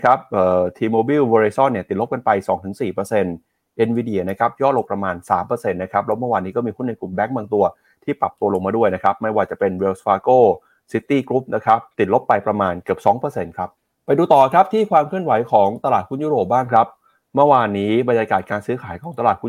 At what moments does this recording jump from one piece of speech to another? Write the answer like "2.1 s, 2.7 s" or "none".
4.9 s, 11.9 s